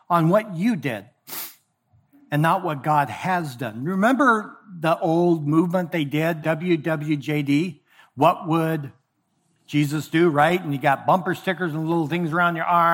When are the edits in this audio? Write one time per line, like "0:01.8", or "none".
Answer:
0:06.4